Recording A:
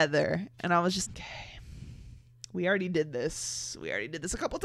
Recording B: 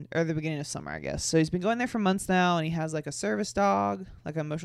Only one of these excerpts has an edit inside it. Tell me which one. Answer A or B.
A